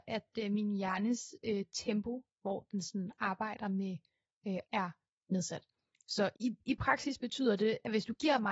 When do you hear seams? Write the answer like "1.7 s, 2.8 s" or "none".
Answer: 4.6 s, 6.3 s